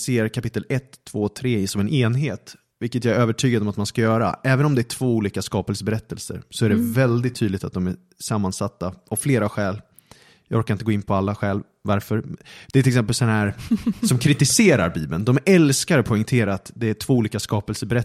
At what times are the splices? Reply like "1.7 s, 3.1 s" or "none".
none